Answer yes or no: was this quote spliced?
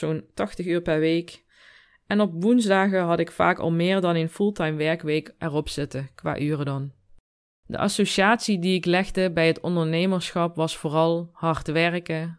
no